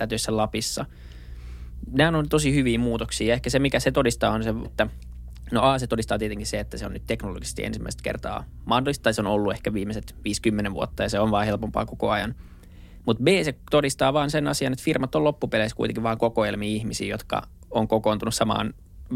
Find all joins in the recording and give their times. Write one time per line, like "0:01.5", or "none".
0:04.6